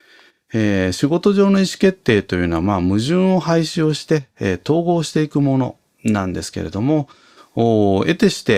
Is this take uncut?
yes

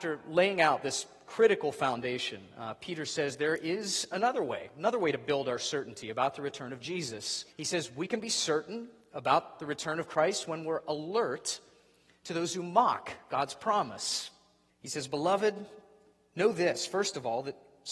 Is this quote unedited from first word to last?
no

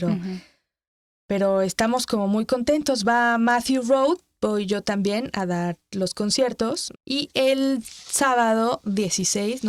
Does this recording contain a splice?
yes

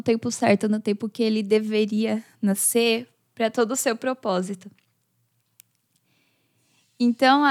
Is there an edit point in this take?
no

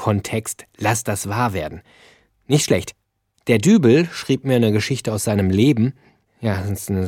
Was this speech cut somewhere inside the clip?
no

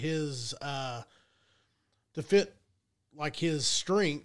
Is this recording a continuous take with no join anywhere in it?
yes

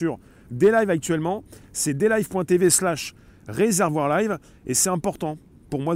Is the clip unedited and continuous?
yes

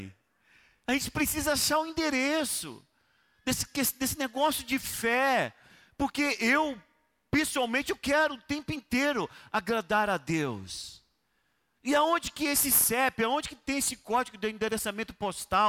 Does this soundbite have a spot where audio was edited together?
no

